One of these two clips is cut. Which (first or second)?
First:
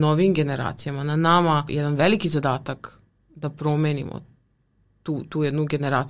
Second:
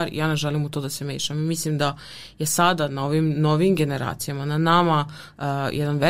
first